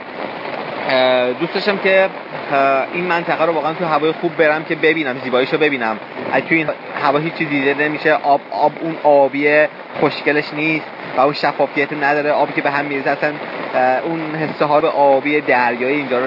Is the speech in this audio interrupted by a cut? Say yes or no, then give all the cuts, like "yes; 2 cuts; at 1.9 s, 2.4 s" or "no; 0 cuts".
yes; 2 cuts; at 6.7 s, 14.8 s